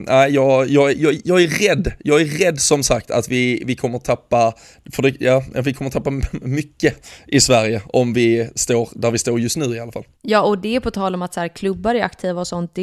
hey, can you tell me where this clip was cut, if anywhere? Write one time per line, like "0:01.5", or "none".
0:10.1